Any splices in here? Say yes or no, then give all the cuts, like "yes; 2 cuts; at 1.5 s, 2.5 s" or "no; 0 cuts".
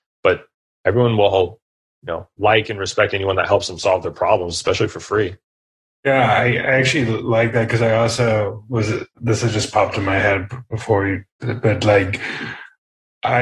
no; 0 cuts